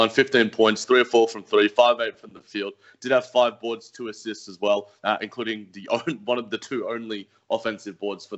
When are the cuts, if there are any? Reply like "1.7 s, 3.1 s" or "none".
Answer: none